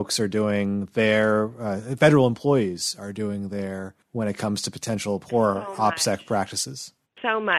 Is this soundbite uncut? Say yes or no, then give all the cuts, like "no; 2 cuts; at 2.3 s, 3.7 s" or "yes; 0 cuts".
yes; 0 cuts